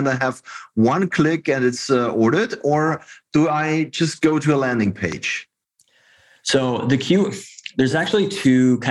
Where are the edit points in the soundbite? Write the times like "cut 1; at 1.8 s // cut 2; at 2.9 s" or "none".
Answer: none